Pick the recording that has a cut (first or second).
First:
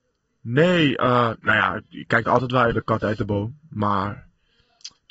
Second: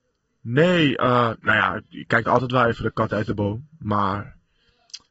first